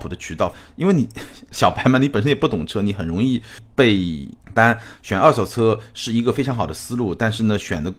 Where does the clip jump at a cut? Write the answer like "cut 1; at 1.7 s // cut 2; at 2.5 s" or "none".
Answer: cut 1; at 4.4 s